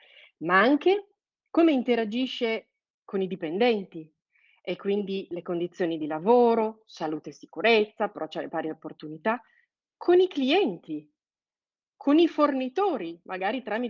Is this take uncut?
yes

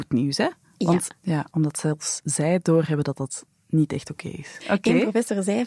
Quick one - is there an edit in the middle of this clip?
yes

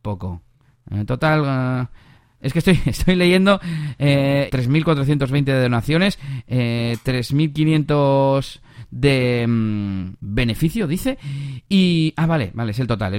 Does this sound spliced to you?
yes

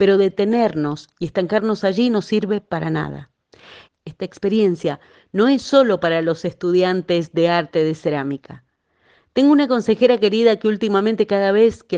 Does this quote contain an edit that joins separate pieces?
yes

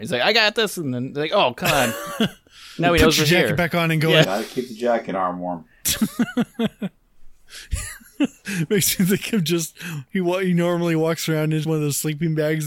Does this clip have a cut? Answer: yes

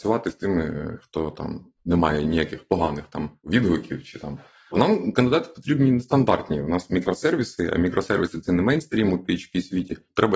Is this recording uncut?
no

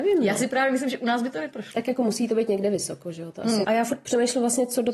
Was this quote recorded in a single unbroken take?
no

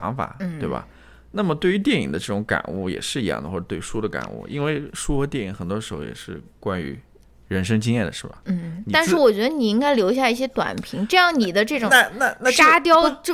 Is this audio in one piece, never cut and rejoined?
yes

